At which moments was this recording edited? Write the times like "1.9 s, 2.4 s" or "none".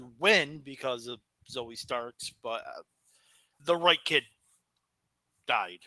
3.6 s